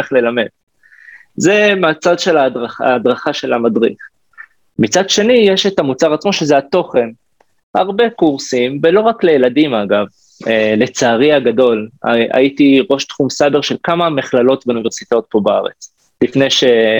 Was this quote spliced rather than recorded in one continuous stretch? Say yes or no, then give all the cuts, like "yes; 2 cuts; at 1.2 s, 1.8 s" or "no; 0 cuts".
no; 0 cuts